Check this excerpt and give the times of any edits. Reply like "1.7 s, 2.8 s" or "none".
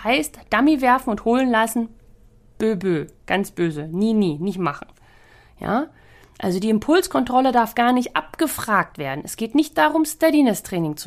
none